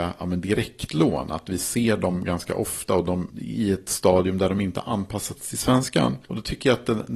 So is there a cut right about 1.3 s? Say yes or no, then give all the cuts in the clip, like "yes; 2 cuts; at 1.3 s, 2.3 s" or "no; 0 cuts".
no; 1 cut; at 6.2 s